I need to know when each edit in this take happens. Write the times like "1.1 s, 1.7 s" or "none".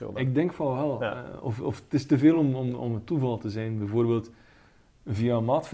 none